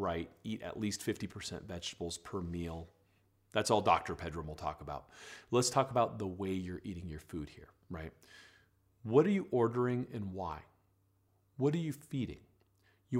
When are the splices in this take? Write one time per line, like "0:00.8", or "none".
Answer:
none